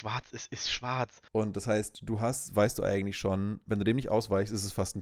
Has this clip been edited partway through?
yes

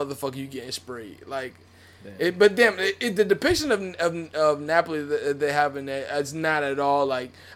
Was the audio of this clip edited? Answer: no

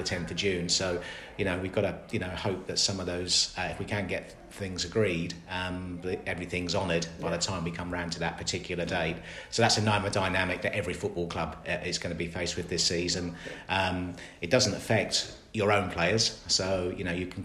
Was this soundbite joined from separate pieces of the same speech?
no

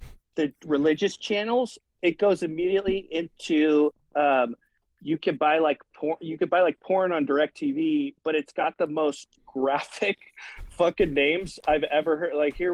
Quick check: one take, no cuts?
yes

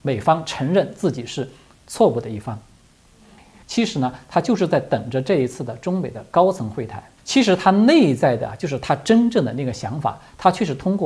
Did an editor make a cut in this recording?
yes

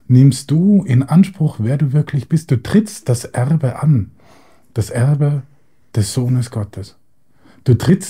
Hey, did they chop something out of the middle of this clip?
no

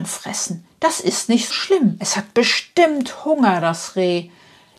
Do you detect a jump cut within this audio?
yes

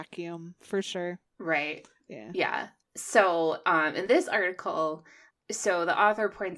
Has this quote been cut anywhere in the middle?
no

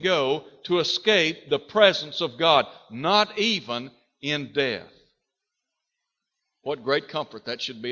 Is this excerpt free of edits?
yes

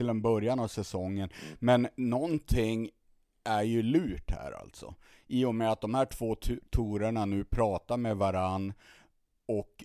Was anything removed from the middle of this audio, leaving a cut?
no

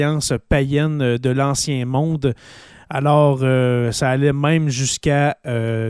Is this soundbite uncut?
yes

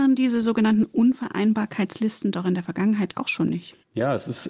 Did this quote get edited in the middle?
no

